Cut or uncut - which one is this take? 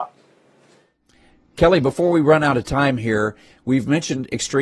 uncut